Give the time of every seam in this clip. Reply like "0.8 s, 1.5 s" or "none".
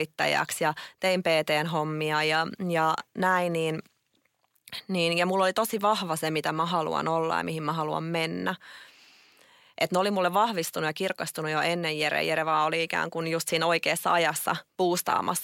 none